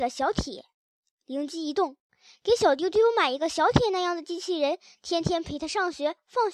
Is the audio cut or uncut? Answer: uncut